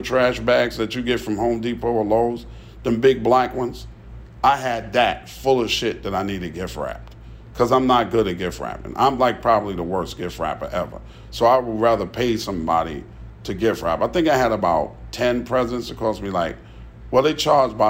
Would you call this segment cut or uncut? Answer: uncut